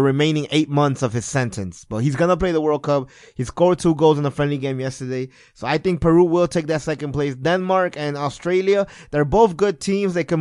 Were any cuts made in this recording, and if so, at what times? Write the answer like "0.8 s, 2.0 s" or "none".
none